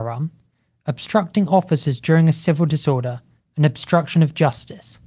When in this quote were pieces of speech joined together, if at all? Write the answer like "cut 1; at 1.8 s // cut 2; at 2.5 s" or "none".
none